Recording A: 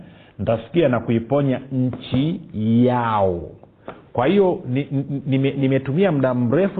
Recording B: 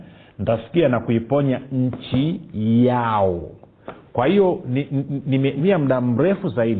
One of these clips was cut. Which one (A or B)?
B